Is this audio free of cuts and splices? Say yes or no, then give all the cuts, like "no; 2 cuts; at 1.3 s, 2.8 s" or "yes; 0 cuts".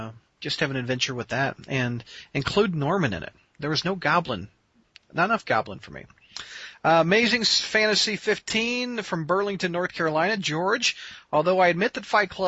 yes; 0 cuts